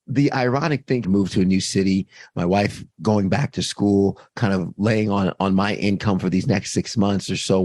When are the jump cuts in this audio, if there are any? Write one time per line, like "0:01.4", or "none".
0:01.0

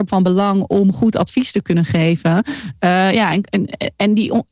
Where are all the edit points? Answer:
none

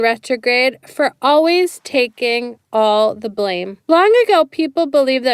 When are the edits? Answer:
0:03.8

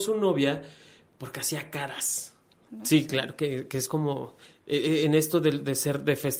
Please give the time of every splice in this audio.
0:02.7

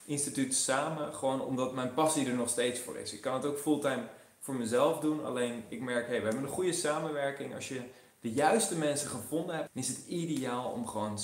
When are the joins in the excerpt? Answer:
0:09.7

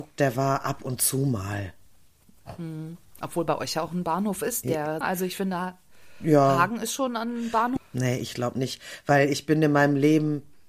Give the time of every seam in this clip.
0:05.0
0:07.8

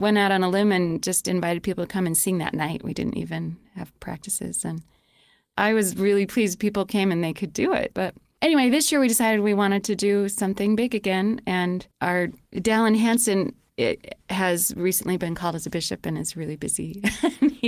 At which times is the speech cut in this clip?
0:07.9
0:11.9

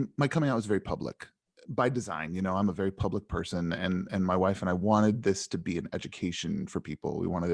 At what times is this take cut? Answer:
none

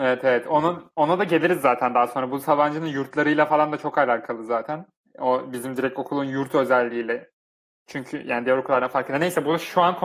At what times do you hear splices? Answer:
none

